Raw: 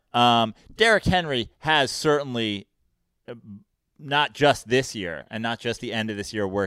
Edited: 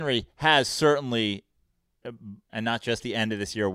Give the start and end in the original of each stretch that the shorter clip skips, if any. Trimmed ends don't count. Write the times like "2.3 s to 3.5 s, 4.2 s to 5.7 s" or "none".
3.7 s to 5.3 s